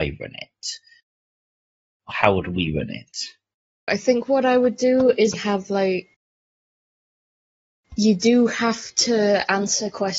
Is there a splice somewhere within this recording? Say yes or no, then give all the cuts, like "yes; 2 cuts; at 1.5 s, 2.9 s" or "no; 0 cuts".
yes; 2 cuts; at 3.9 s, 5.3 s